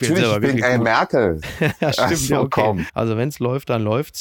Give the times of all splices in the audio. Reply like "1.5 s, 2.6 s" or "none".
1.4 s, 2.9 s